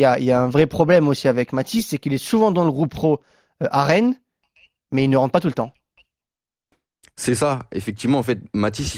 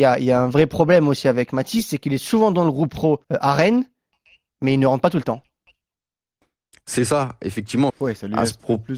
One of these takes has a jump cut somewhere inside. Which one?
second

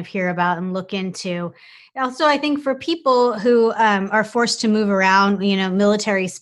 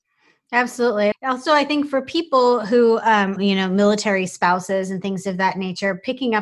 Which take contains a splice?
second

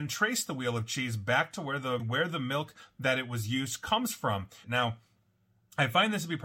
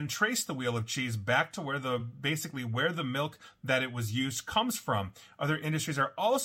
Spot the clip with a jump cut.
first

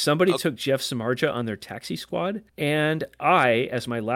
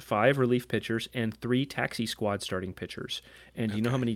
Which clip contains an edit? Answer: first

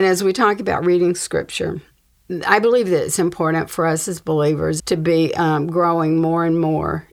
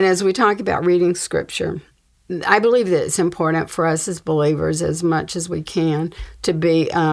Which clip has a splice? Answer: first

